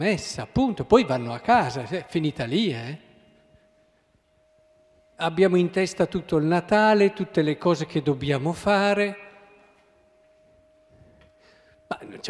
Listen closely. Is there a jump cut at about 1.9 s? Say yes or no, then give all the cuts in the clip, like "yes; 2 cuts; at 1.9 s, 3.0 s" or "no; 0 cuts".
no; 1 cut; at 5.1 s